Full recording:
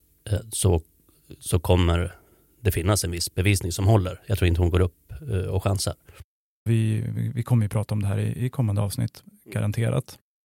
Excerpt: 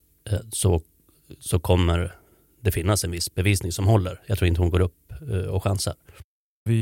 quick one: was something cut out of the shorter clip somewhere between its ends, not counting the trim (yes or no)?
no